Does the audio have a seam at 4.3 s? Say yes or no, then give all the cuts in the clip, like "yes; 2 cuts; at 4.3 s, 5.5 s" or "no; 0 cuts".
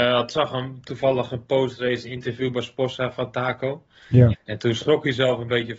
yes; 1 cut; at 4.3 s